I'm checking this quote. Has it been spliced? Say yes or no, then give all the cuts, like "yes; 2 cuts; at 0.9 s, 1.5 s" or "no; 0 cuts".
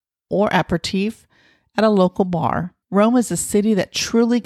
yes; 1 cut; at 2.8 s